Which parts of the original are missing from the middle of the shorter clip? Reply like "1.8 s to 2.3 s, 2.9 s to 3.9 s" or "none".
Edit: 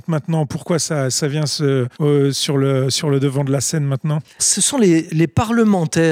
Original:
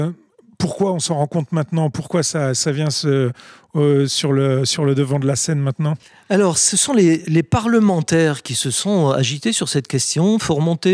3.4 s to 3.7 s, 6.1 s to 6.5 s